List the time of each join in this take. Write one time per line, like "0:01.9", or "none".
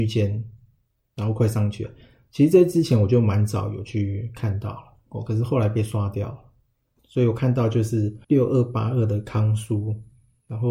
0:07.0
0:08.2